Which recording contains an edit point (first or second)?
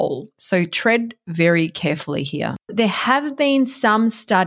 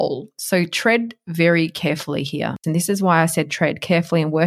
second